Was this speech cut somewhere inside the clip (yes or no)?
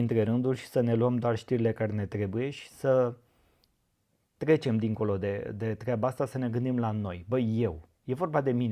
no